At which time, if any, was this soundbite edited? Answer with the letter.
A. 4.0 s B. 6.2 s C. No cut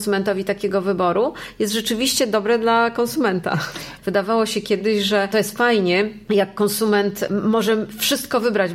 A